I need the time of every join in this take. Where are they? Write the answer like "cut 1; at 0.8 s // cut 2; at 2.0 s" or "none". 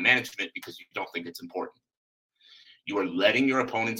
none